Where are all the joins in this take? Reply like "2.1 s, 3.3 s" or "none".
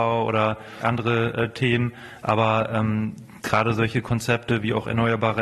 none